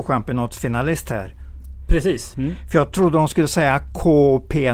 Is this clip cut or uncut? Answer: cut